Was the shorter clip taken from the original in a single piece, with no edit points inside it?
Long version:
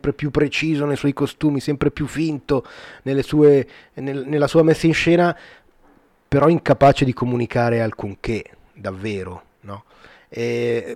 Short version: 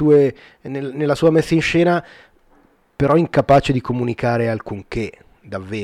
yes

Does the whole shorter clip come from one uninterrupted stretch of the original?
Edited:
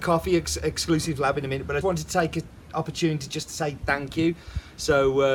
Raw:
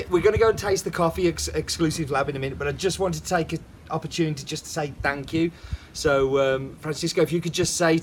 no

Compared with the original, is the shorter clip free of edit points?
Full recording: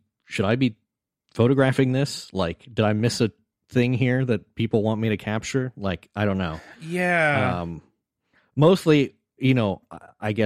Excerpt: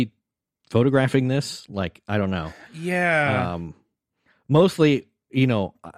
no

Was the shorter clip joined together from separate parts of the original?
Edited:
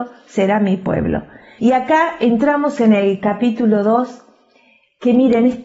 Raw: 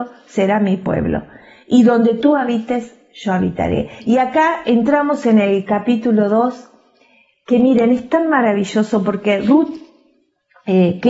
yes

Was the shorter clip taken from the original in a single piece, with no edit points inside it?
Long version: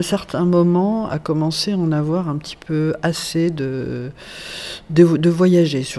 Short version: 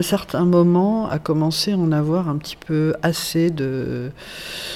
yes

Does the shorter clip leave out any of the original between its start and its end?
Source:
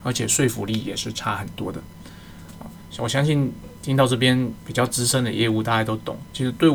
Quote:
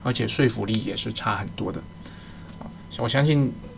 no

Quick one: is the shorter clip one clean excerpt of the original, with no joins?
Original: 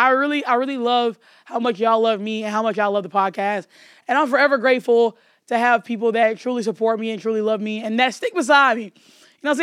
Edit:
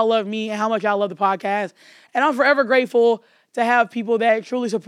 yes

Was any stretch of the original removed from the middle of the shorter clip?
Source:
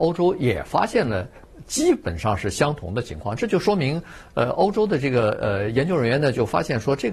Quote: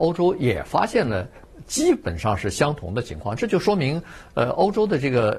no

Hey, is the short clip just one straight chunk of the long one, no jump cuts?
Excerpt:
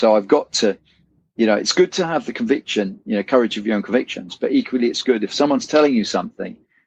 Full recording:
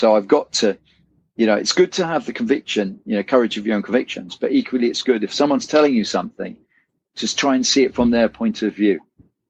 yes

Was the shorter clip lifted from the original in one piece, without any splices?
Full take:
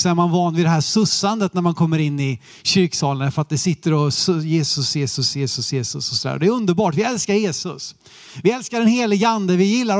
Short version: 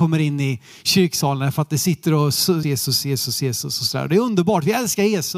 no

